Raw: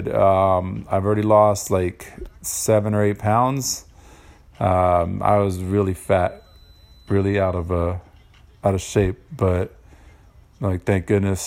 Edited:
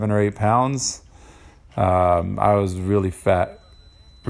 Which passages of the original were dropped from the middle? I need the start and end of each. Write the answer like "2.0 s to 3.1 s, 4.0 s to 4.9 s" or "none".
none